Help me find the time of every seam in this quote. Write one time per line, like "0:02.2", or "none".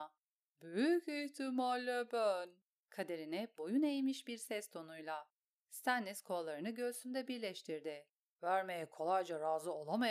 0:02.8
0:08.3